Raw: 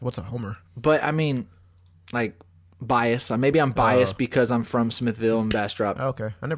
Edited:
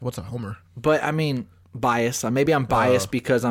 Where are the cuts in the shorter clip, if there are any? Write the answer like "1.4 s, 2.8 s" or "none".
1.6 s